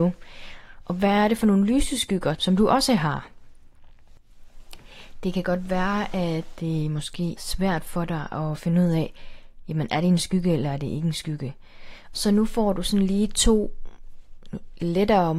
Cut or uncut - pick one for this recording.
cut